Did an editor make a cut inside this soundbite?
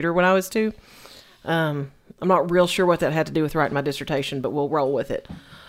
no; 0 cuts

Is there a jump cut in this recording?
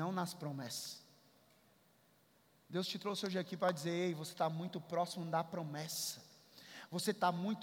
no; 0 cuts

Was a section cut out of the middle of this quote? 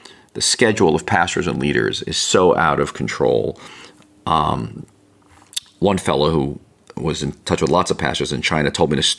no; 0 cuts

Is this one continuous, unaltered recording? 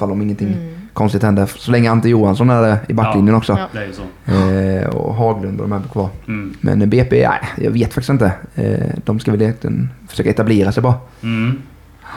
yes; 0 cuts

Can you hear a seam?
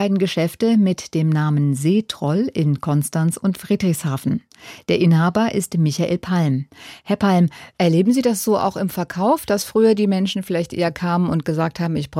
no; 0 cuts

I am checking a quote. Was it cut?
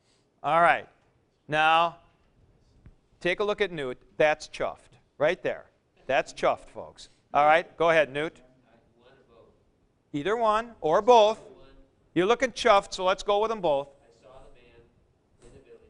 no; 0 cuts

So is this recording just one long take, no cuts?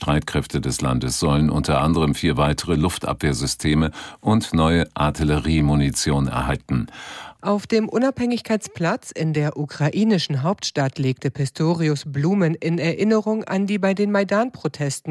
no; 1 cut; at 7.3 s

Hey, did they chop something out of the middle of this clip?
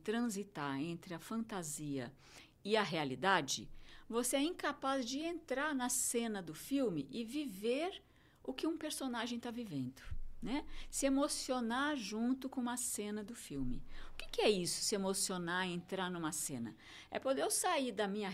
no; 0 cuts

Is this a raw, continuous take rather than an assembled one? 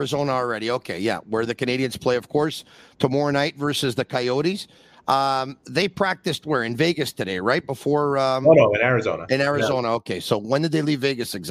yes; 0 cuts

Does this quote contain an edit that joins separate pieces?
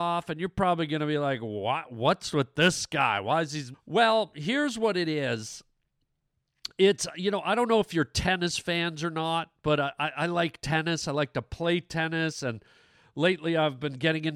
yes; 1 cut; at 3.7 s

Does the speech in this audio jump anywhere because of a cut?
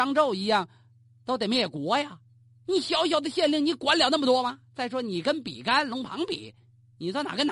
yes; 1 cut; at 2.7 s

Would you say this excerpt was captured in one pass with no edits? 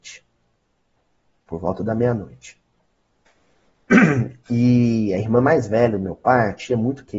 yes; 0 cuts

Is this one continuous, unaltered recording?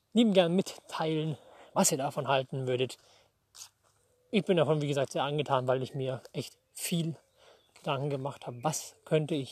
yes; 0 cuts

